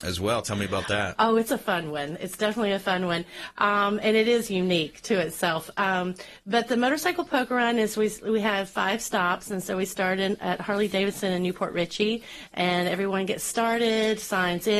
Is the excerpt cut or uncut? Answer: uncut